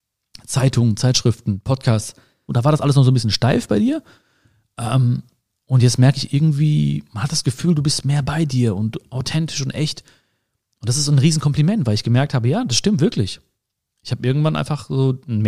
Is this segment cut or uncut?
cut